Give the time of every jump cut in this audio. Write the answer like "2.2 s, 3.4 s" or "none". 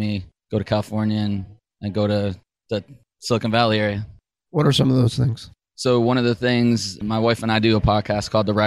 4.5 s